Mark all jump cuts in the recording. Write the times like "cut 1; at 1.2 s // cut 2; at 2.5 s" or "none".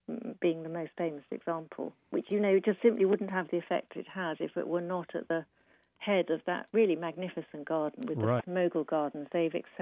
cut 1; at 8.4 s